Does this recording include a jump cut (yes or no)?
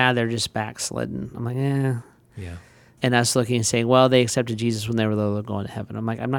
yes